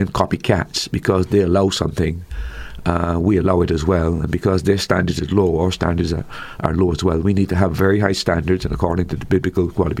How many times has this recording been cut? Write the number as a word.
zero